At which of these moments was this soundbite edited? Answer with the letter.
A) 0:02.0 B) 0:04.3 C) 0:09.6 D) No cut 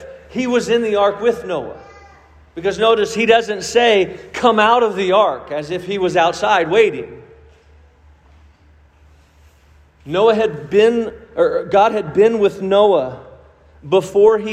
D